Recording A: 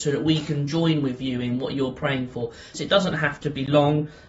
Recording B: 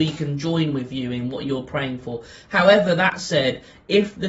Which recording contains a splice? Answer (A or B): A